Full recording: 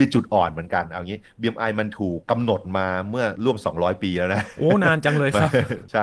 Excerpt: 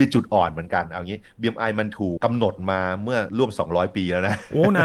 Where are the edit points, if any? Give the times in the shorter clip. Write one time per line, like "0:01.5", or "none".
0:02.2